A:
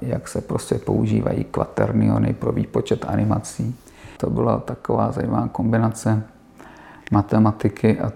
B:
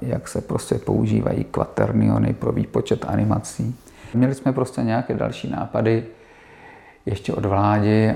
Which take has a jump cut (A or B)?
B